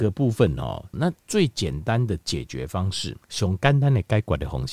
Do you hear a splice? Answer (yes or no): yes